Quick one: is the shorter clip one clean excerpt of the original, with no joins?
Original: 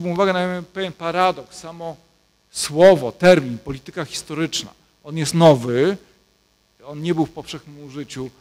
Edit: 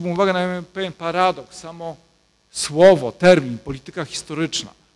yes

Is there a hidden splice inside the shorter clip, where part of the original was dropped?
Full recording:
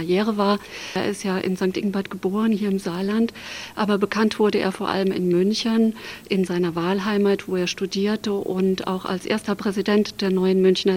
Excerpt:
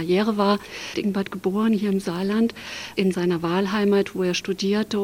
yes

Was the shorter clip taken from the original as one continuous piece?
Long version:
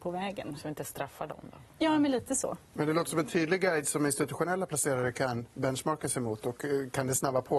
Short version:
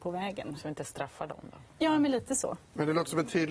yes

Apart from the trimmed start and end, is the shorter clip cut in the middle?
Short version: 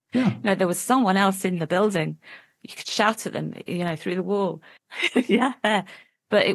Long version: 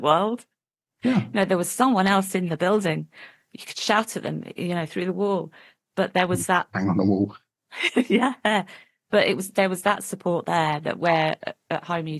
yes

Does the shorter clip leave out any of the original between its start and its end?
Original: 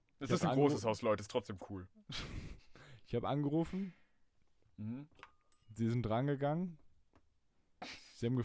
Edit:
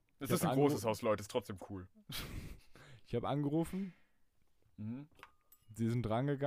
no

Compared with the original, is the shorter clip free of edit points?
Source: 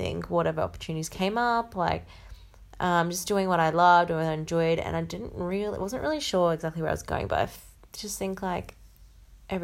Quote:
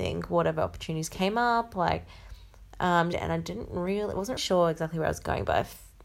no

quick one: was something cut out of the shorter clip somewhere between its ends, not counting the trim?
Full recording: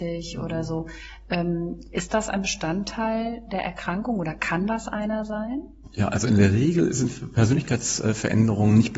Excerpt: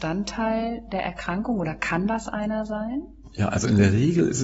no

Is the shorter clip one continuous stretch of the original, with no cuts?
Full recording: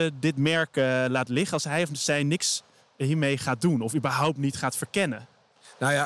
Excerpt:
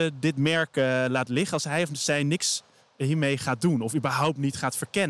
yes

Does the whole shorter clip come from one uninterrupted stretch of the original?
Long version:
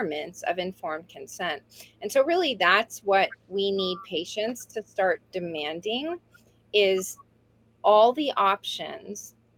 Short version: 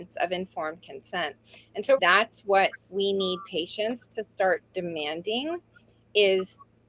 no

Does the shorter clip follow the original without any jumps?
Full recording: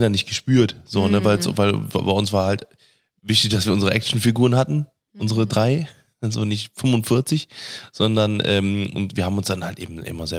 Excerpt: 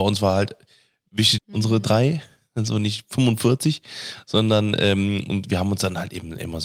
no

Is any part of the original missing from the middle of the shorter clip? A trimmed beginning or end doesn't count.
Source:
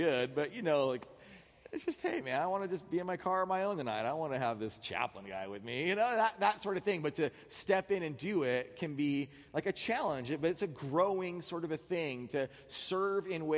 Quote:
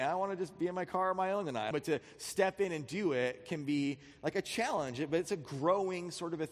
yes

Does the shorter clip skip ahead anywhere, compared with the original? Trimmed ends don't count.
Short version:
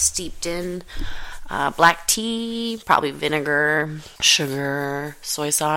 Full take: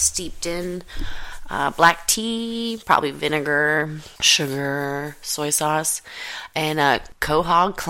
no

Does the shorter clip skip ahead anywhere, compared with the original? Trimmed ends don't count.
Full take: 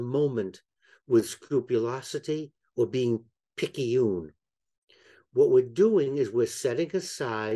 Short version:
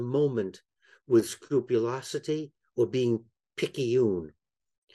no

